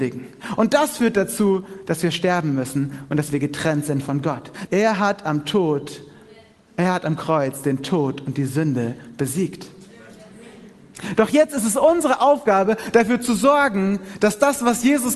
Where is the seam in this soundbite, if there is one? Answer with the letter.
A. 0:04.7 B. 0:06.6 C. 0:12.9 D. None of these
A